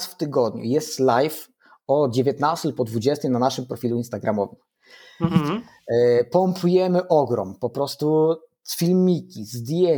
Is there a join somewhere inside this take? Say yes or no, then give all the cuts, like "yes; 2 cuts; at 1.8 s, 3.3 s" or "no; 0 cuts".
no; 0 cuts